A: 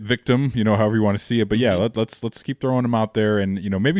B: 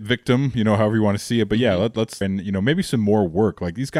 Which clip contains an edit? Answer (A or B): B